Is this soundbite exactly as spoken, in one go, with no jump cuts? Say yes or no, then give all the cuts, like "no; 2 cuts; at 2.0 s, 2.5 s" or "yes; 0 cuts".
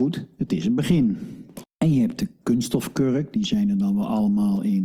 no; 1 cut; at 1.6 s